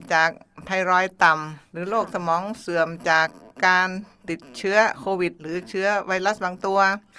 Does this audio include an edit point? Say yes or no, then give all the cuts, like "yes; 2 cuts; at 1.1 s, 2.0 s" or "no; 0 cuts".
no; 0 cuts